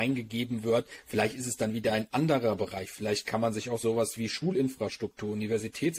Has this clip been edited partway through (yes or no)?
no